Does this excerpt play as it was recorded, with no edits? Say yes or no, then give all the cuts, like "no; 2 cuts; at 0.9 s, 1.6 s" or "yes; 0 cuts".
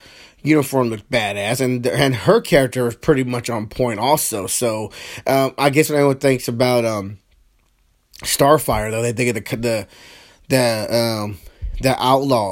yes; 0 cuts